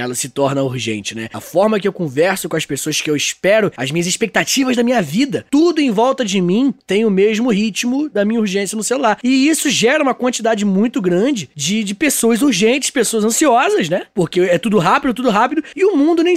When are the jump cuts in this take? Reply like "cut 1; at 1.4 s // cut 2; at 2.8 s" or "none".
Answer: none